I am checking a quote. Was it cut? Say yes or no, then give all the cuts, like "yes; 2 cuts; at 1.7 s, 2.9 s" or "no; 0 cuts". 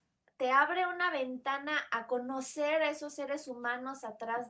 no; 0 cuts